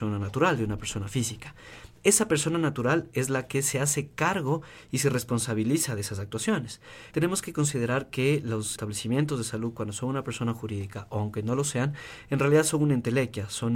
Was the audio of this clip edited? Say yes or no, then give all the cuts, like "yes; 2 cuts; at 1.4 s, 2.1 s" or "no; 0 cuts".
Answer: yes; 1 cut; at 7.1 s